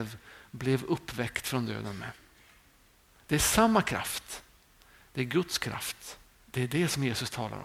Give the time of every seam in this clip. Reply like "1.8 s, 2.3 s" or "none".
6.3 s